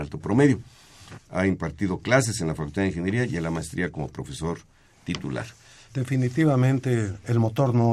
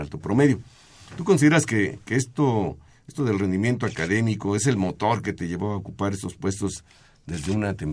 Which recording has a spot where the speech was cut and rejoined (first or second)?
first